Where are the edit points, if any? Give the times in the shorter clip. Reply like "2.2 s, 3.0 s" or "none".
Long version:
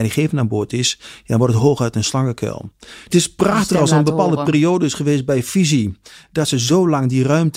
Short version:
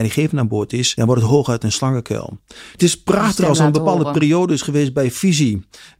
1.0 s